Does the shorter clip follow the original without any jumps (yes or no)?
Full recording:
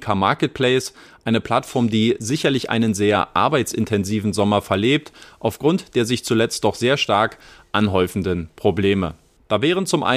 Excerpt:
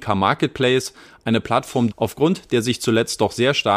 no